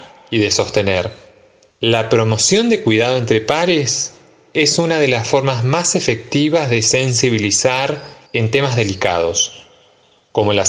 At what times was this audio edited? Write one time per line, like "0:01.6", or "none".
0:01.7
0:08.3

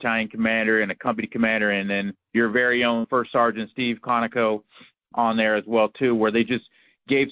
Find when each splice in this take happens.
none

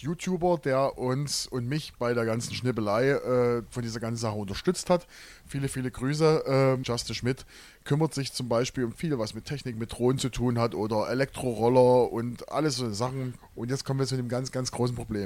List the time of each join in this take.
0:06.8
0:13.4

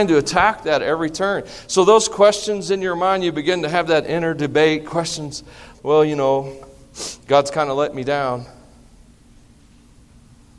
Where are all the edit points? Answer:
0:05.7

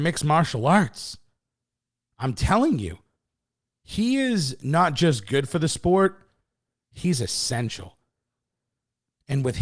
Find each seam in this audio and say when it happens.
none

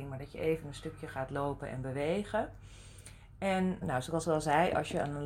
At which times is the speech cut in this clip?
0:03.8

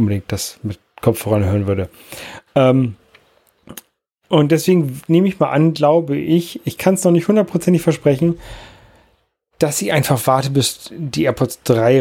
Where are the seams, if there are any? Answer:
none

